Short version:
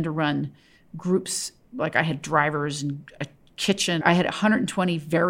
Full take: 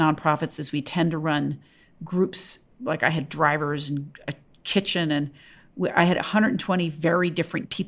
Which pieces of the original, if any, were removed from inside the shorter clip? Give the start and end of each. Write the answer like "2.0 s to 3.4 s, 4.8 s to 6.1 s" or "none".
5.1 s to 5.9 s